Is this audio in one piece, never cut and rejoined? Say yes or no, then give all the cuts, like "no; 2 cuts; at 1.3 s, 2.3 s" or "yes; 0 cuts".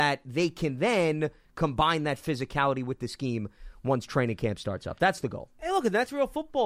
yes; 0 cuts